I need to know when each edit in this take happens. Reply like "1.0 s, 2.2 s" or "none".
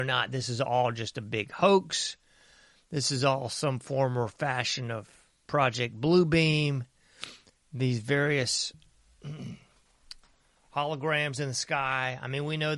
none